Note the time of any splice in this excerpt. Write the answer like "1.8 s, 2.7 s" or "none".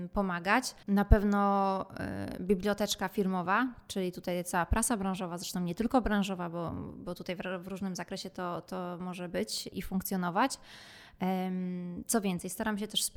9.7 s

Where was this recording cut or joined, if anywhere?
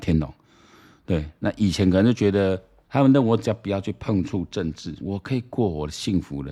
2.8 s, 5.0 s

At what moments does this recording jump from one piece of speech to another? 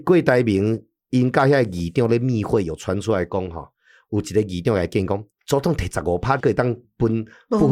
5.3 s, 6.4 s

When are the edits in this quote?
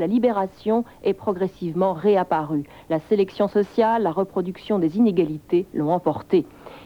none

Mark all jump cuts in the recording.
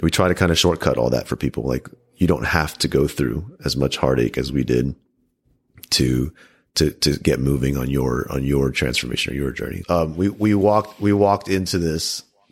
9.8 s

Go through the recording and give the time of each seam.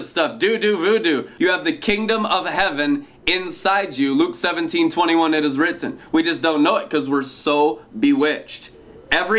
1.4 s

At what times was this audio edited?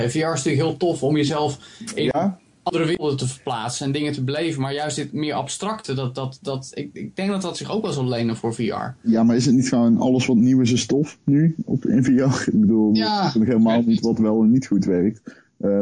none

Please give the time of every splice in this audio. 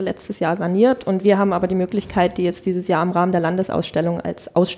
none

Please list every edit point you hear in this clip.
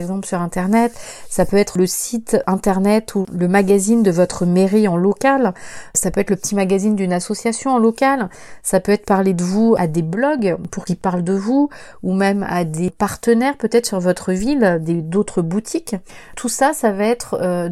none

